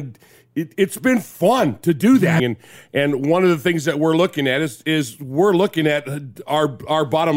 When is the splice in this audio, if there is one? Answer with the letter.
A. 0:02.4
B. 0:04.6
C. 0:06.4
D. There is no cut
A